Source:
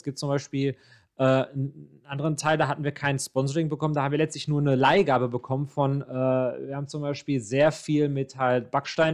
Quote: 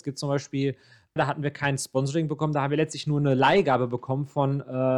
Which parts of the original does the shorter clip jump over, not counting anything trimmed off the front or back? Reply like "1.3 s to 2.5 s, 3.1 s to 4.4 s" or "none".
1.2 s to 2.6 s

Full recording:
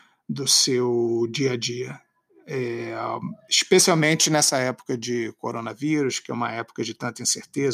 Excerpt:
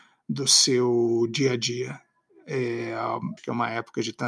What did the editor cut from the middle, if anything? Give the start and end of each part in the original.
3.4 s to 6.2 s

